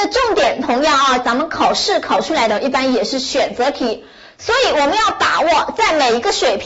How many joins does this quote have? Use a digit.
1